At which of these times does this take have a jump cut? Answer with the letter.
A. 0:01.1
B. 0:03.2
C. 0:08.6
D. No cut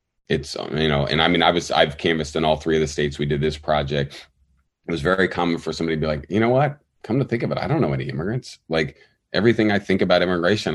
D